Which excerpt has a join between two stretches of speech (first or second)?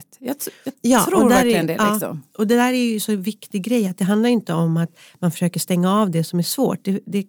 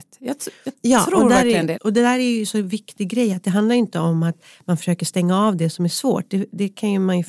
second